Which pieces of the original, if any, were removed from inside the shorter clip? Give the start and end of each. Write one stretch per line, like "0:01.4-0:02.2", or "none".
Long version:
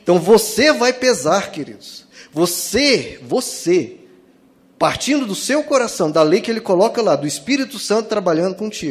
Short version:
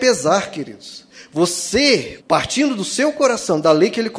0:03.2-0:04.7